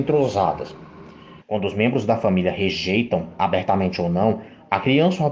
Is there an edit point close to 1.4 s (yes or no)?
yes